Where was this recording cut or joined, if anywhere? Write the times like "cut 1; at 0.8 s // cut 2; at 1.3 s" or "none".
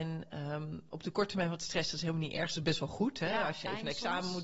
none